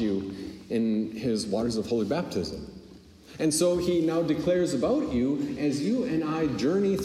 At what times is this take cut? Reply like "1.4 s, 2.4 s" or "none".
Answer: none